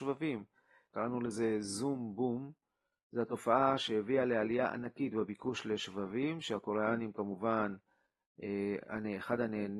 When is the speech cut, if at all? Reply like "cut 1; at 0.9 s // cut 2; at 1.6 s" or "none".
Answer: cut 1; at 0.9 s

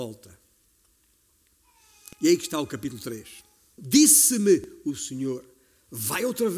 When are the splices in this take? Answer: cut 1; at 3.8 s

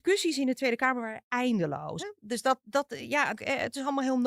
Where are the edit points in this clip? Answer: cut 1; at 2.0 s // cut 2; at 3.4 s

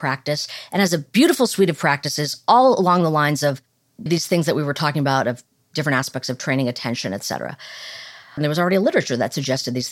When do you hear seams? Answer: cut 1; at 4.1 s // cut 2; at 8.4 s

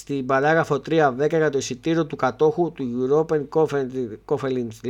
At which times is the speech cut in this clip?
none

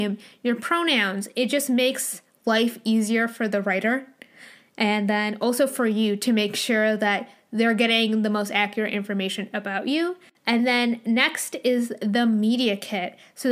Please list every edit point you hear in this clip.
none

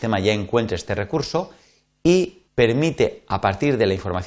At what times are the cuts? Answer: cut 1; at 2.5 s

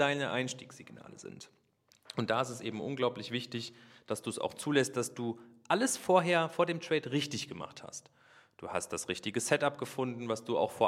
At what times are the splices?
none

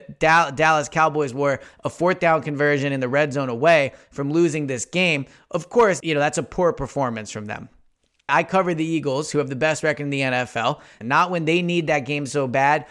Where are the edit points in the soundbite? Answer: cut 1; at 6.0 s // cut 2; at 8.3 s // cut 3; at 11.0 s

